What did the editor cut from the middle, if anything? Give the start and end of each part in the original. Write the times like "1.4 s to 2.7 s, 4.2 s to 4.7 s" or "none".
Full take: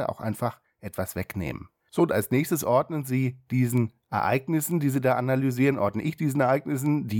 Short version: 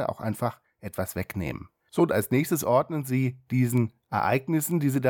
none